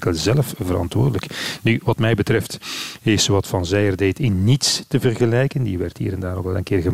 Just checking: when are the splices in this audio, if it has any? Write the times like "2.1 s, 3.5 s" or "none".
none